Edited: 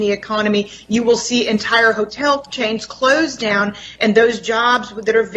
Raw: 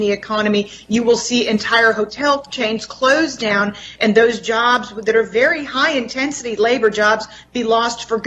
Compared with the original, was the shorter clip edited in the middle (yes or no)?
no